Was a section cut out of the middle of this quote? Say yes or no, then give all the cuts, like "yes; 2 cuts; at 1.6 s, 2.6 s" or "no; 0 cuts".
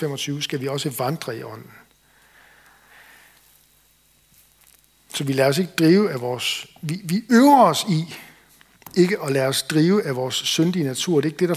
no; 0 cuts